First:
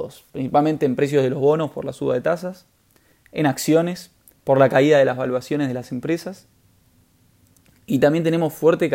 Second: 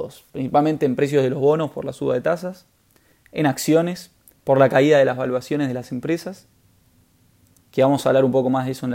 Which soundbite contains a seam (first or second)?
second